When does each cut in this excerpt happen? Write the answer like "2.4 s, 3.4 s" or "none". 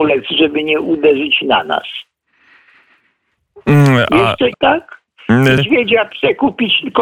4.5 s, 5.6 s